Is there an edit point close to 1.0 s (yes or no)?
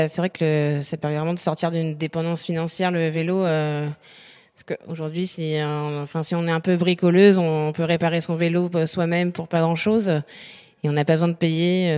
no